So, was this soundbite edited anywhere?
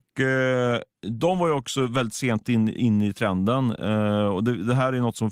no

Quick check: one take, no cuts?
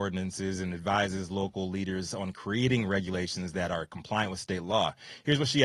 yes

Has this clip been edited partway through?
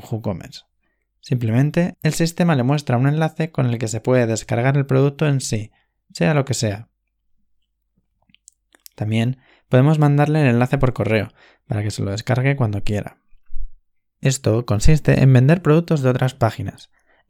yes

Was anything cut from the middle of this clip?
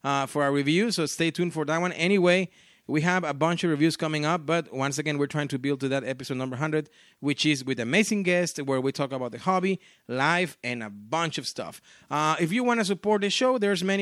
no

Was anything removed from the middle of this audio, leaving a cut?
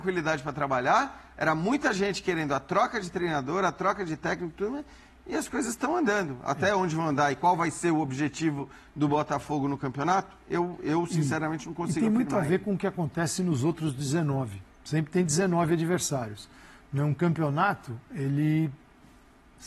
yes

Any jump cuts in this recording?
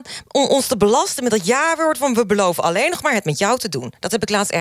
no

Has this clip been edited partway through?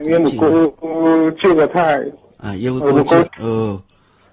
yes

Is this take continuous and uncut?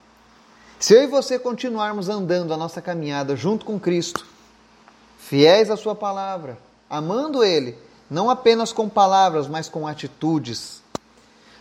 yes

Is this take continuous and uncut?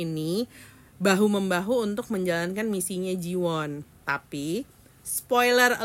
no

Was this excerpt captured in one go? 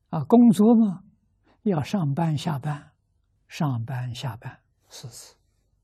no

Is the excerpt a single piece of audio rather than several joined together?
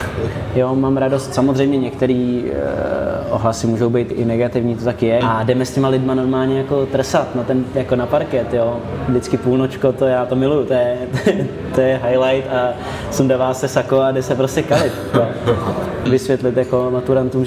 no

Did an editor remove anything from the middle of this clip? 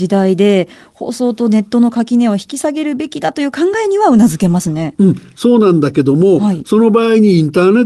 no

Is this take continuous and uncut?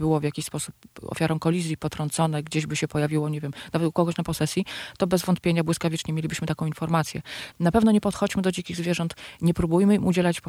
no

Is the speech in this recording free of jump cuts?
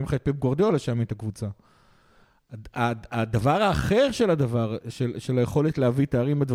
yes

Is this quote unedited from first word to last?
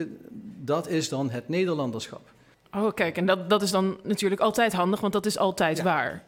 no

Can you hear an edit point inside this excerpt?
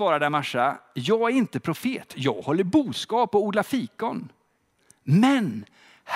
yes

